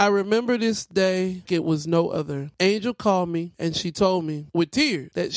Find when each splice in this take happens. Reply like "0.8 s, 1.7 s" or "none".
1.5 s